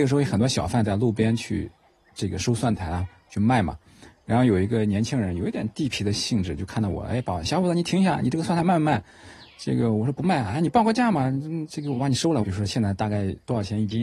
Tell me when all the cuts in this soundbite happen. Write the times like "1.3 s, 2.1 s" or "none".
12.4 s